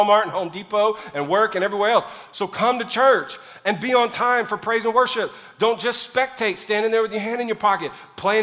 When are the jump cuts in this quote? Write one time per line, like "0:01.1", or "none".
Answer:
none